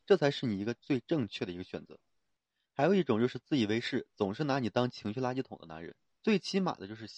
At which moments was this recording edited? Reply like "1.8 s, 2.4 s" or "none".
6.2 s